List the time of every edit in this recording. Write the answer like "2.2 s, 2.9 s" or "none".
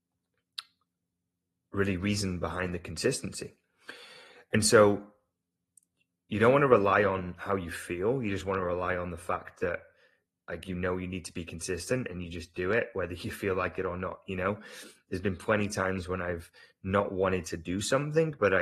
none

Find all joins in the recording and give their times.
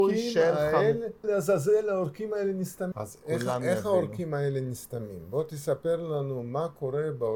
1.2 s, 2.9 s

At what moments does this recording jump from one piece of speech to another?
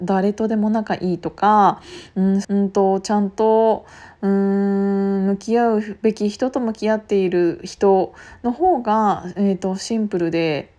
2.4 s

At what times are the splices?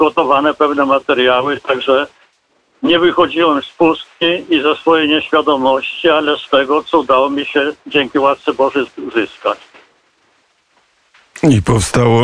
none

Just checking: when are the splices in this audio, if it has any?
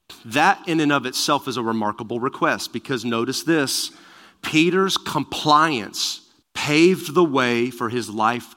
6.4 s

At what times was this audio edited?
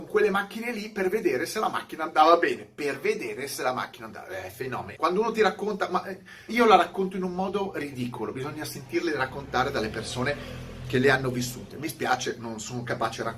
4.9 s, 6.5 s

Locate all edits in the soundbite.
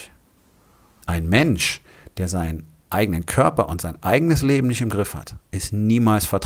1.0 s

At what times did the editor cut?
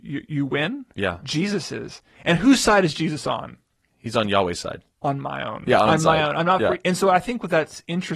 5.9 s

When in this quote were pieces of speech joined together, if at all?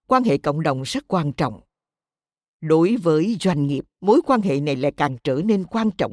3.9 s

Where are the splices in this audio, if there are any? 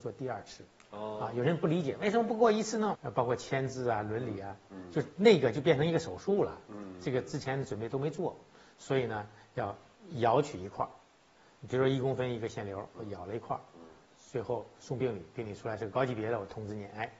3.0 s

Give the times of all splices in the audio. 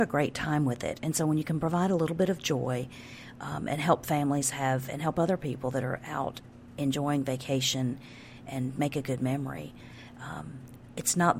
8.5 s

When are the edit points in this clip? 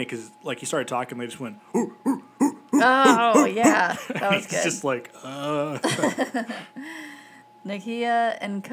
none

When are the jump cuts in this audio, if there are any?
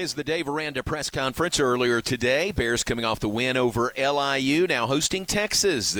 none

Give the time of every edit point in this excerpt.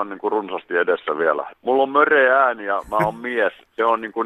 1.5 s

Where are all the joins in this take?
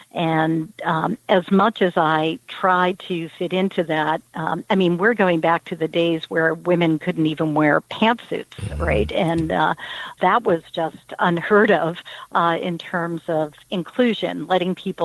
10.2 s

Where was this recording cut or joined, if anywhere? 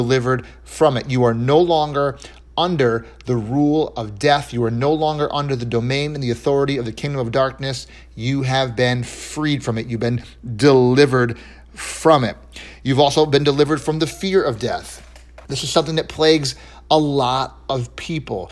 15.4 s

